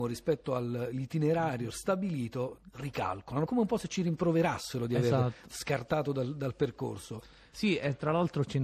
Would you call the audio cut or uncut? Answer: cut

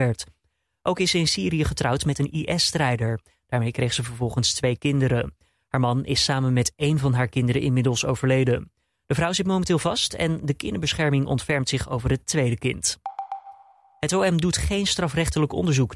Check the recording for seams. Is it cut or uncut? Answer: uncut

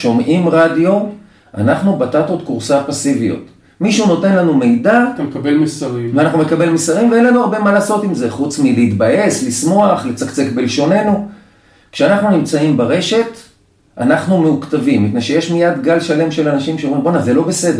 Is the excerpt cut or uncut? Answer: uncut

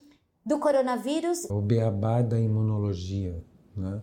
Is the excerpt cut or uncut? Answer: cut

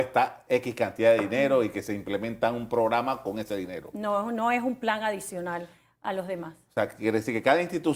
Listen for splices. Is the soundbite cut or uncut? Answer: uncut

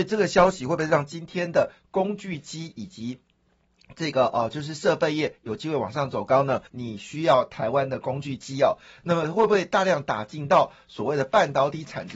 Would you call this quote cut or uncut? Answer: cut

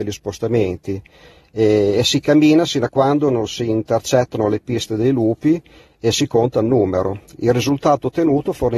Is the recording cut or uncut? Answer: uncut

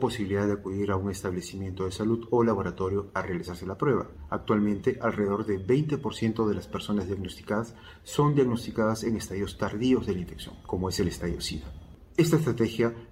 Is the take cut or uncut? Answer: uncut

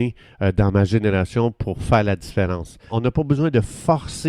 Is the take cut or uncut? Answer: cut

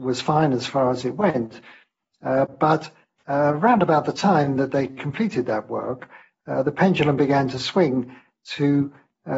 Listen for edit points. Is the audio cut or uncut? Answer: uncut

